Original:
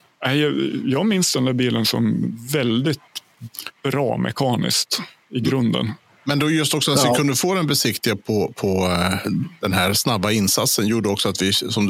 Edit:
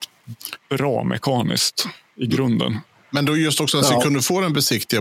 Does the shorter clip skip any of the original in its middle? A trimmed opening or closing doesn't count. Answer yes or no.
no